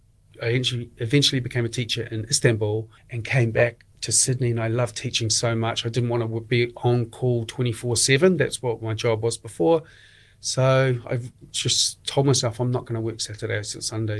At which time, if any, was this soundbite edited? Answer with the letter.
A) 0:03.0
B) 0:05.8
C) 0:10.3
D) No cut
A